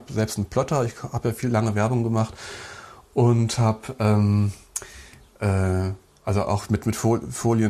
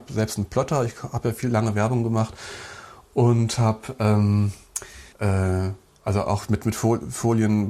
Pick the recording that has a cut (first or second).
second